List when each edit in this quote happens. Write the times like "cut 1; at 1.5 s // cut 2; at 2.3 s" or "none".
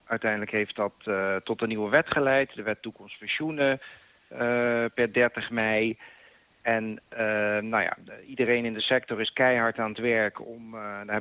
none